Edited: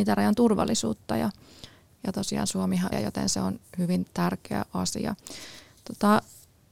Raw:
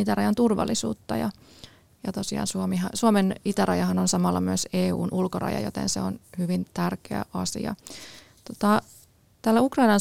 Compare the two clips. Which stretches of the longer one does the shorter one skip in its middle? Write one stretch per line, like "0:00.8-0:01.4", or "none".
0:02.9-0:05.5